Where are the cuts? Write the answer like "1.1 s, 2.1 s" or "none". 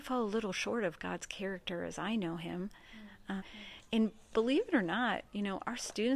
3.4 s